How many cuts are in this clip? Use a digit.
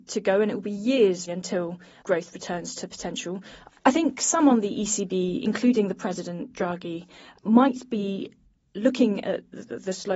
2